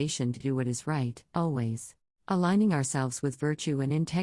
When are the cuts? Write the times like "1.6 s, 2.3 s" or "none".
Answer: 2.1 s